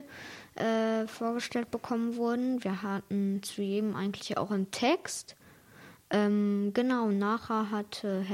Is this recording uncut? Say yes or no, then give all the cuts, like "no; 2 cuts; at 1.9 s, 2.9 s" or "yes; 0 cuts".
yes; 0 cuts